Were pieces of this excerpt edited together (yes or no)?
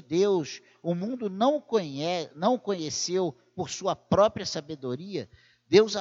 no